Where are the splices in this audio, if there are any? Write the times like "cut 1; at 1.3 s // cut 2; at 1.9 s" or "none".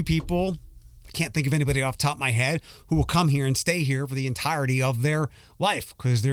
none